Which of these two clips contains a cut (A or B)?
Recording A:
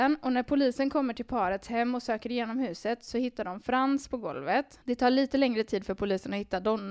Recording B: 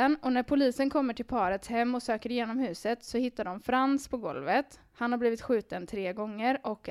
A